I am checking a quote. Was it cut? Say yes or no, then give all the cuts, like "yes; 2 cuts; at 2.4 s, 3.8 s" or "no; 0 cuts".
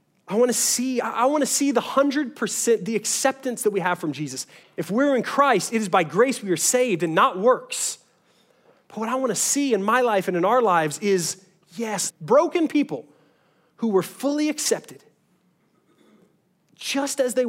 yes; 2 cuts; at 4.6 s, 12.1 s